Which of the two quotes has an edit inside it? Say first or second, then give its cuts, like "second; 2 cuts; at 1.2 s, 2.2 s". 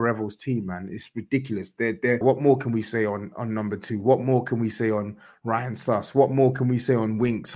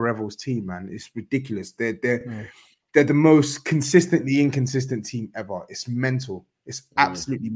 first; 1 cut; at 2.2 s